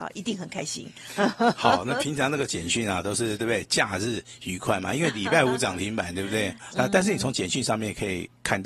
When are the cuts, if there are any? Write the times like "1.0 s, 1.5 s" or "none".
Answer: 6.7 s